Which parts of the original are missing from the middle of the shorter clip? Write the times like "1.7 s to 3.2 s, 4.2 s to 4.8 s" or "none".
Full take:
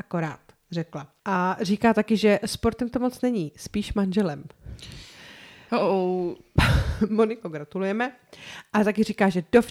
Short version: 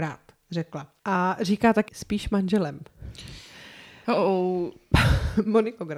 2.1 s to 3.5 s